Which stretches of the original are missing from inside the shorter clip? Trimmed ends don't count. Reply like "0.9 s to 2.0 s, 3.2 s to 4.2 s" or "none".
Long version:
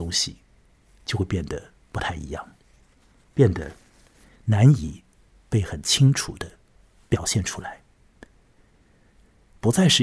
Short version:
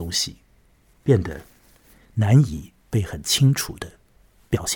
0.9 s to 3.2 s, 5.1 s to 5.4 s